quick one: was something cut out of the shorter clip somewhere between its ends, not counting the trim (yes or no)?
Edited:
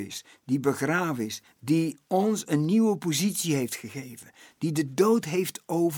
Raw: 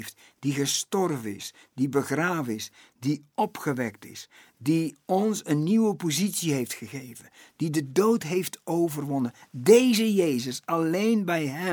yes